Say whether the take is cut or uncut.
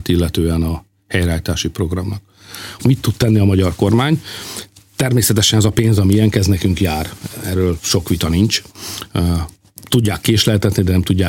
cut